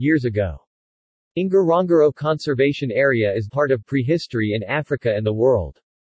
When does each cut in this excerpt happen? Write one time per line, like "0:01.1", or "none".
0:03.5